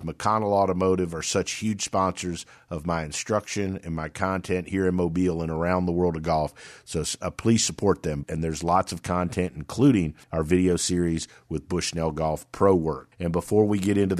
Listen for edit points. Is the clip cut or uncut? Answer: cut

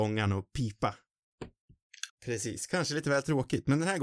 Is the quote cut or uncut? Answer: cut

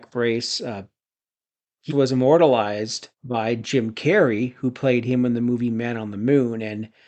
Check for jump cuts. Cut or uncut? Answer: cut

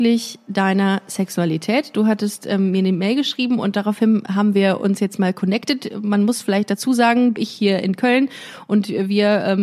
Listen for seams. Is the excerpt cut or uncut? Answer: cut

